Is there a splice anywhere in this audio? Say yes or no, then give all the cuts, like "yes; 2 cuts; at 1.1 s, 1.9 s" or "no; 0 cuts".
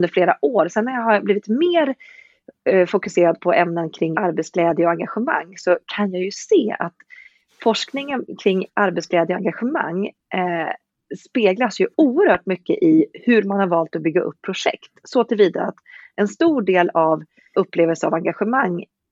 yes; 2 cuts; at 4.1 s, 17.5 s